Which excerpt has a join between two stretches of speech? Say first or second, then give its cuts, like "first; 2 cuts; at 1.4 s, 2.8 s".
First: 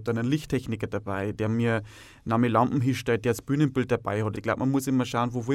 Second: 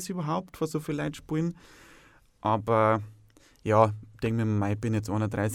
first; 1 cut; at 4.3 s